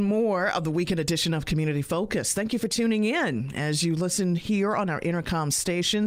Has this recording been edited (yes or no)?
no